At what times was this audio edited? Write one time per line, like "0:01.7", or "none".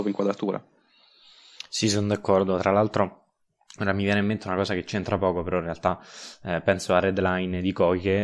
none

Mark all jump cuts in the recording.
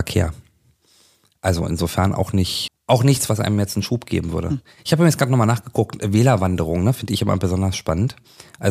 0:02.7

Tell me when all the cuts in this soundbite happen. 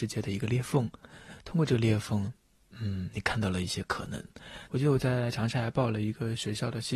0:04.7

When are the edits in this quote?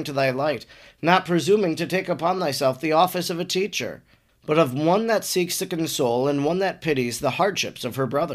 none

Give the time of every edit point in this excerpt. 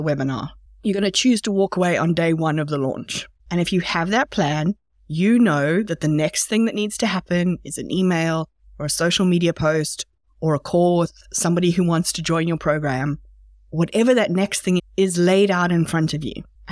0:14.8

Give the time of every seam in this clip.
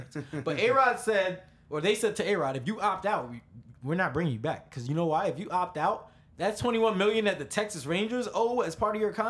none

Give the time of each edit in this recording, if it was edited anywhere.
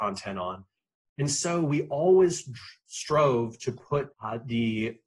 0:04.1

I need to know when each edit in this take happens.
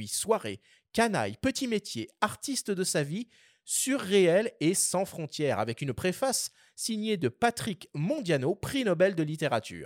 none

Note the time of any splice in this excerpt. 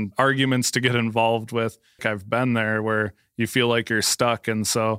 0:02.0

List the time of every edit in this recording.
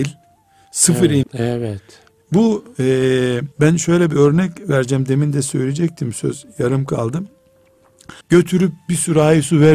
0:01.2
0:03.5
0:08.2

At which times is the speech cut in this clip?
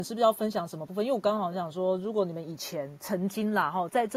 none

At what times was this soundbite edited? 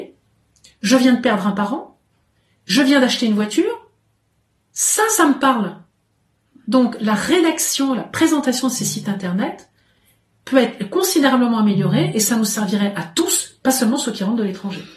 none

